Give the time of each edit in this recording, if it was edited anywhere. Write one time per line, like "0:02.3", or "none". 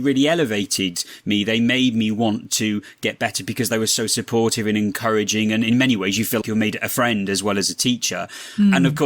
0:06.4